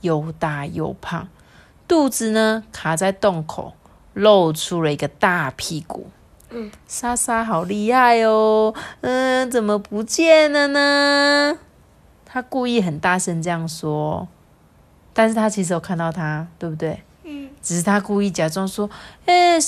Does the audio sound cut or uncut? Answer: cut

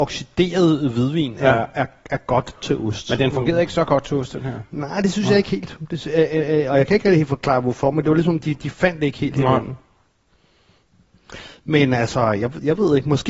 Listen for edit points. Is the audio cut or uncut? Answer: uncut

